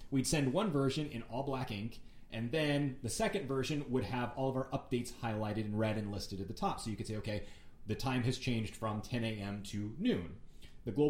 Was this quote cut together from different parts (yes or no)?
no